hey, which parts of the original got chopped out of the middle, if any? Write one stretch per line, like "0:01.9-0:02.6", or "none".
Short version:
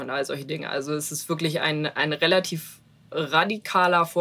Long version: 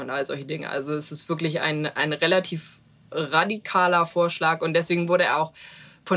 none